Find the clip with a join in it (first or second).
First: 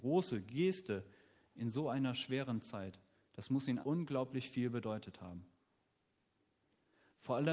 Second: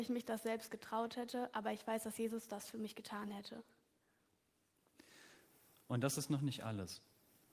first